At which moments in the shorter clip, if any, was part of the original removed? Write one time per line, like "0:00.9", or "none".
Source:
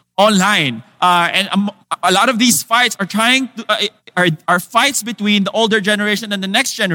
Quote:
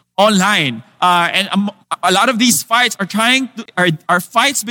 0:03.7